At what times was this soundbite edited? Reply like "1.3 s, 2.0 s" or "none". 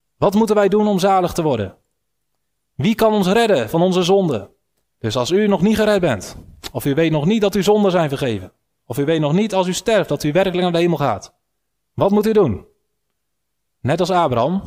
4.8 s